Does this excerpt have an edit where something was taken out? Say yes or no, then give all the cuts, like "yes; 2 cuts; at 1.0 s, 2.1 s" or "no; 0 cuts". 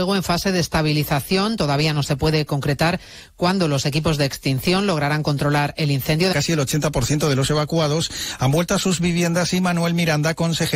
yes; 1 cut; at 6.3 s